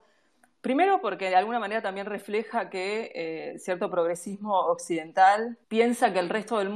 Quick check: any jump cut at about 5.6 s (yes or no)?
yes